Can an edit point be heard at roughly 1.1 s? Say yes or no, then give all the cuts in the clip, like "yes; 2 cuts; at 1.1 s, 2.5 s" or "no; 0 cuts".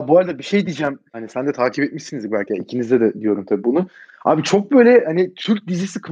yes; 1 cut; at 1.1 s